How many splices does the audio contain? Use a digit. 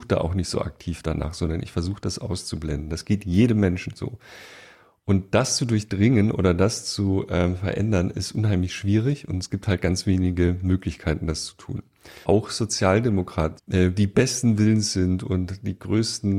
2